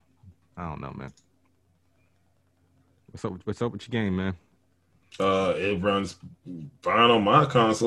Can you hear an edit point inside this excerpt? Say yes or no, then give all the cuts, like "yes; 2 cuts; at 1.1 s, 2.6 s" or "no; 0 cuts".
no; 0 cuts